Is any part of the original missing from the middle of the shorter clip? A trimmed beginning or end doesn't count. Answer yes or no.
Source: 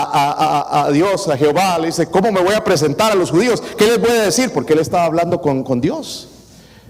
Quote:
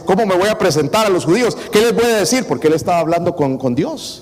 no